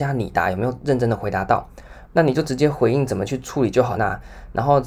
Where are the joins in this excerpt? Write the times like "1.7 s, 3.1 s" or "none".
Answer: 2.1 s, 4.0 s